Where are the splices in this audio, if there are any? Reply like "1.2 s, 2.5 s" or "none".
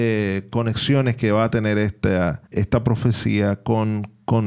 2.5 s

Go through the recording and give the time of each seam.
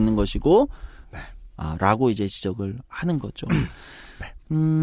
1.0 s

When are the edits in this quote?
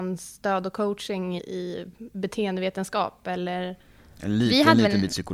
1.4 s

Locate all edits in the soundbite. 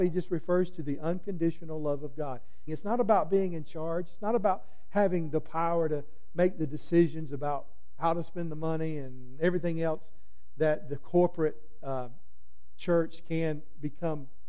2.7 s

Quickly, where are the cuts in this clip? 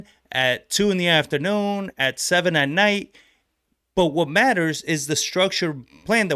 none

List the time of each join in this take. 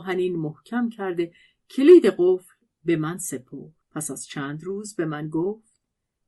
3.8 s

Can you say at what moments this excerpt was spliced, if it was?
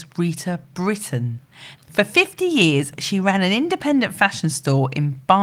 1.8 s

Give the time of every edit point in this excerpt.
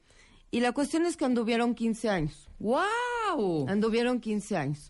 none

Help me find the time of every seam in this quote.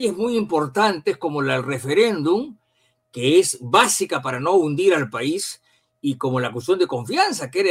none

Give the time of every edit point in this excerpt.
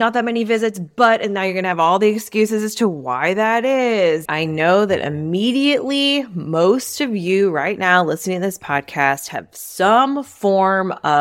4.3 s

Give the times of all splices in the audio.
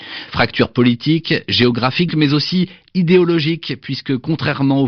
2.1 s

